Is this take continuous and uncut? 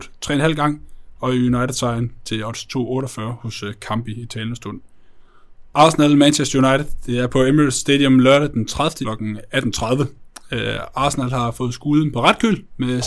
no; 2 cuts; at 5.7 s, 9.0 s

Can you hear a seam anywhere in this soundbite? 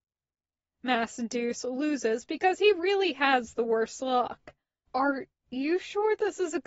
yes; 1 cut; at 4.9 s

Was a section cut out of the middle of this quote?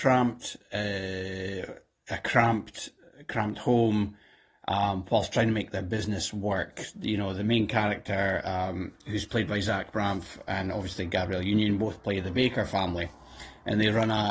no; 0 cuts

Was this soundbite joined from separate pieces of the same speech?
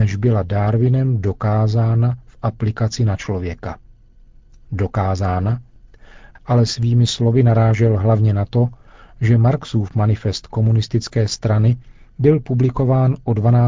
yes; 1 cut; at 6.3 s

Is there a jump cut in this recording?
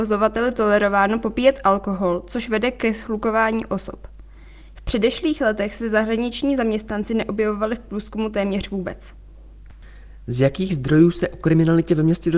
yes; 1 cut; at 4.7 s

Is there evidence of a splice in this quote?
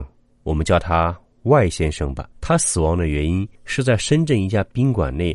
yes; 2 cuts; at 2.3 s, 3.6 s

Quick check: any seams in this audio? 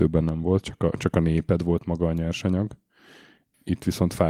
no; 0 cuts

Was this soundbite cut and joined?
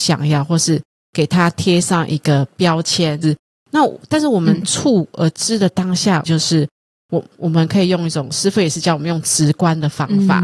yes; 2 cuts; at 3.2 s, 6.3 s

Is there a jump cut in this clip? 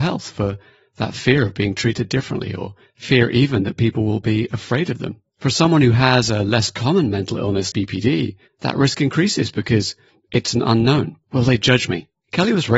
yes; 2 cuts; at 7.7 s, 11.2 s

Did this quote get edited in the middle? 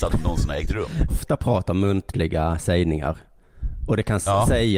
yes; 1 cut; at 1.1 s

